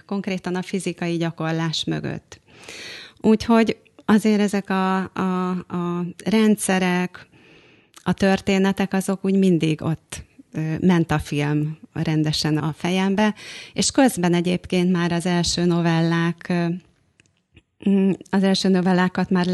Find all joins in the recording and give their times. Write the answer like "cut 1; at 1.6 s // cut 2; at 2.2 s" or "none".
cut 1; at 12.6 s